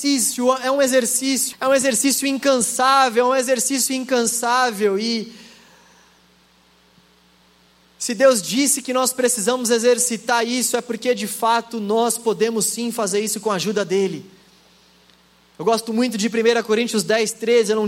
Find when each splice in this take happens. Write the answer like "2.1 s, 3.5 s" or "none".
1.5 s